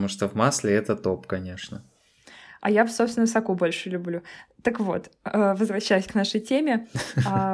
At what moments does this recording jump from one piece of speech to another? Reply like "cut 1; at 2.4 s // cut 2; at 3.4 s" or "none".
none